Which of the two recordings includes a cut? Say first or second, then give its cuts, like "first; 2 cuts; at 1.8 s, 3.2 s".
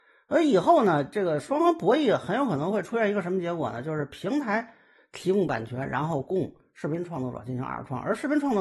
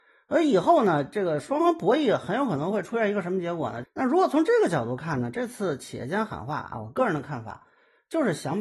second; 1 cut; at 3.8 s